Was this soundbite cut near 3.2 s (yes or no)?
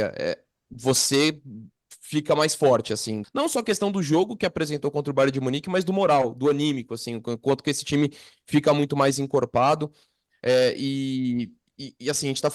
yes